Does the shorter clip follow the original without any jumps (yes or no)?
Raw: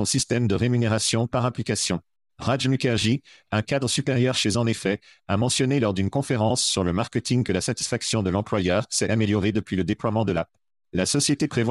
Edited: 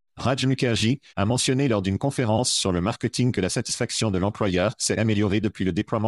no